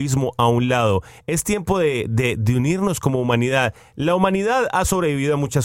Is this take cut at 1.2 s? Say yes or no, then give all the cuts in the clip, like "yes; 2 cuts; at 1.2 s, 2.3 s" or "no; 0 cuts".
no; 0 cuts